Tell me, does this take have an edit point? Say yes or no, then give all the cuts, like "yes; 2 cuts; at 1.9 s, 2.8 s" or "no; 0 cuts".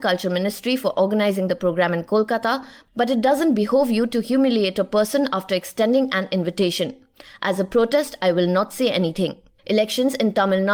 yes; 1 cut; at 9.6 s